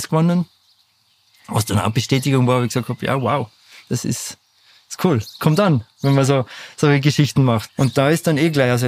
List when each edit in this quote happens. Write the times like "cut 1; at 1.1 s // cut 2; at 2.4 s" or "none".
cut 1; at 7.7 s